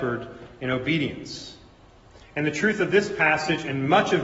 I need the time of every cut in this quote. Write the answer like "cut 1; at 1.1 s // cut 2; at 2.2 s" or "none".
none